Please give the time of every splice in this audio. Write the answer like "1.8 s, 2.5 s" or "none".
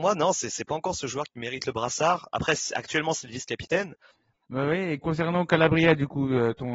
4.1 s